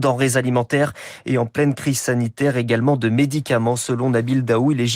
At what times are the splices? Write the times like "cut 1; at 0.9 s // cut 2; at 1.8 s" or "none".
none